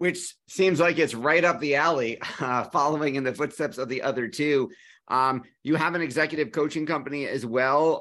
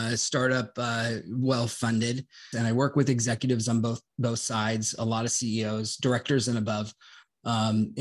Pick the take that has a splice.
second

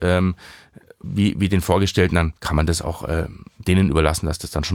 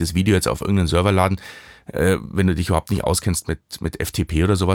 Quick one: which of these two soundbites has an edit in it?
first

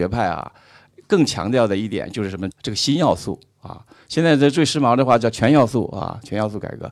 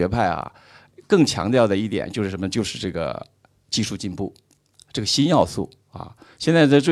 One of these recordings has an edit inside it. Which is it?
first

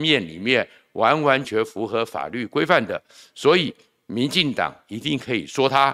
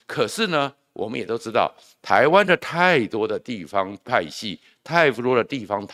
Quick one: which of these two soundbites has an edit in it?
first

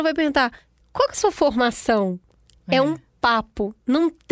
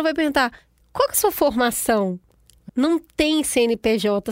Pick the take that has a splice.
second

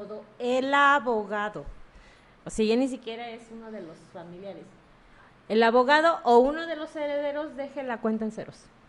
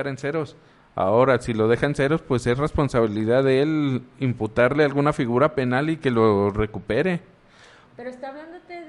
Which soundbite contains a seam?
second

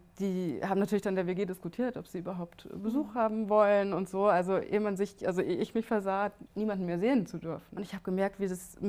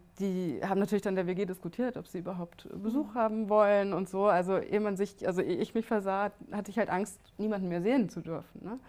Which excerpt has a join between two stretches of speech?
first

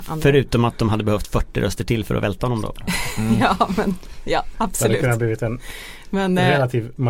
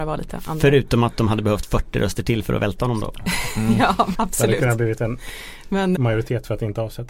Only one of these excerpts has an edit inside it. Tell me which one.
second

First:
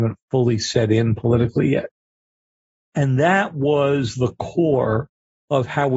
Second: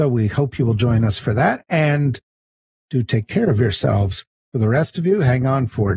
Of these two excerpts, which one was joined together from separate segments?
first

